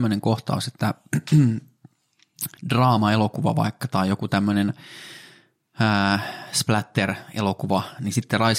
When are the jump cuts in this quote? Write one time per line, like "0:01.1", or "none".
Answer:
0:02.6